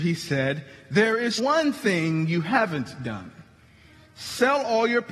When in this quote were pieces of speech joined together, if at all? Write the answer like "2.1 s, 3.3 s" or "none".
1.4 s